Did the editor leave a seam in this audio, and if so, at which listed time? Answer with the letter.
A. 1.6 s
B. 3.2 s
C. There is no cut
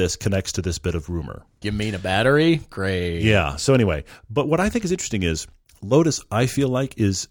A